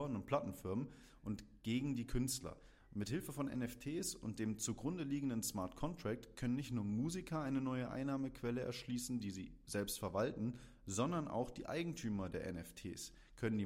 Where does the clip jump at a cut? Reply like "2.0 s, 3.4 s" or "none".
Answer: none